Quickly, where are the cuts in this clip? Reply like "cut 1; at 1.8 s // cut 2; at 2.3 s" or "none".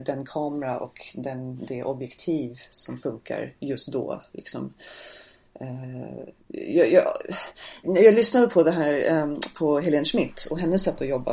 cut 1; at 6.4 s // cut 2; at 7.8 s